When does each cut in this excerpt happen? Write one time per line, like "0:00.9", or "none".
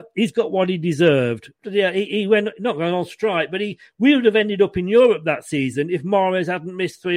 0:01.6